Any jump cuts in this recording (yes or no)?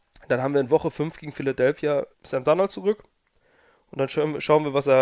yes